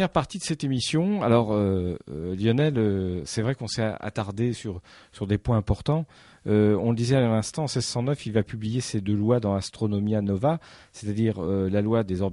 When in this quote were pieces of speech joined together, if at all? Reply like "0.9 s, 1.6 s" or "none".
none

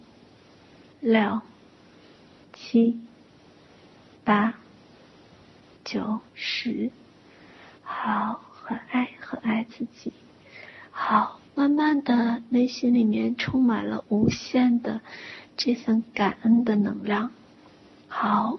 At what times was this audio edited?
6.3 s

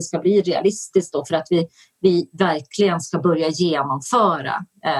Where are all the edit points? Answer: none

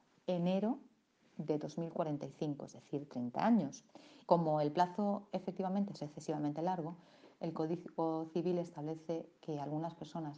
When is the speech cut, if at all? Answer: 4.3 s

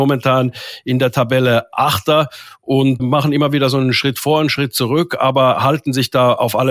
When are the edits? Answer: 3.0 s

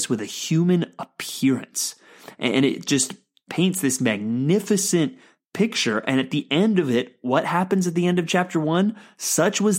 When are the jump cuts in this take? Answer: 3.5 s

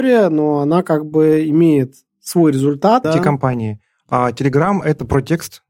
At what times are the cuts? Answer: 3.0 s

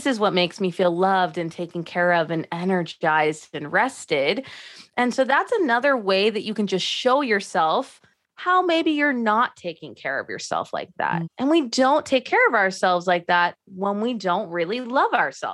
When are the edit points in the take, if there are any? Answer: 11.2 s

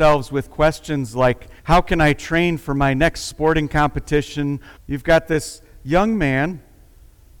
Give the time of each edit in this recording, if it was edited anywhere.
1.6 s, 4.8 s

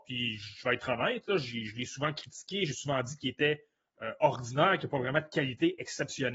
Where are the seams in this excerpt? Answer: none

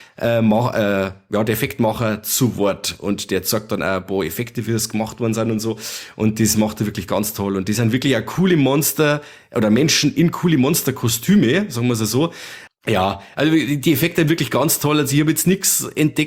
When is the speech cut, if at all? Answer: 12.7 s

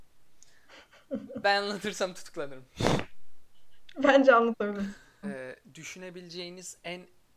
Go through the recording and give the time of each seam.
1.4 s, 5.2 s

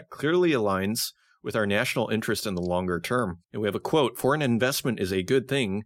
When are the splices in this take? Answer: 3.4 s

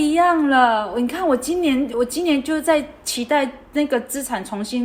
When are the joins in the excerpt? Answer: 1.9 s

